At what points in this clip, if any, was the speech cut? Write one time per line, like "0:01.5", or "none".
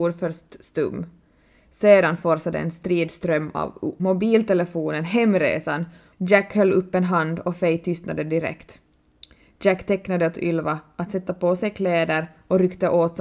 0:04.0
0:06.1